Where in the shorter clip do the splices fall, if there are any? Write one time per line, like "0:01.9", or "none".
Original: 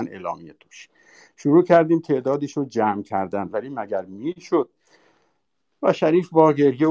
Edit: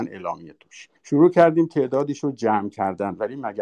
0:01.0